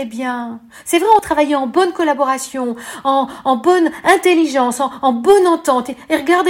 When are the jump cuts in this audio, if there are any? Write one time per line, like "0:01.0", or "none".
none